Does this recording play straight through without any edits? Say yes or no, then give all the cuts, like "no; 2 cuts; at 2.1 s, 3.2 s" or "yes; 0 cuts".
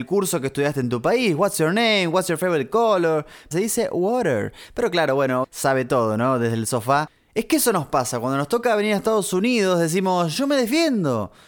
no; 2 cuts; at 3.5 s, 5.4 s